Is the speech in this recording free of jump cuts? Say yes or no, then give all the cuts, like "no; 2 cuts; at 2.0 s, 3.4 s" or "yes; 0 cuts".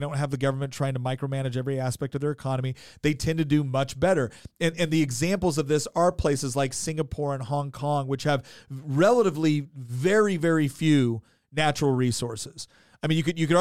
yes; 0 cuts